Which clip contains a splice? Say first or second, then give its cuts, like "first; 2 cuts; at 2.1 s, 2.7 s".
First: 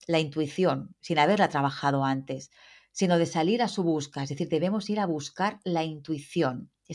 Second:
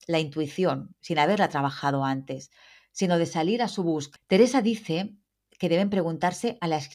second; 1 cut; at 4.2 s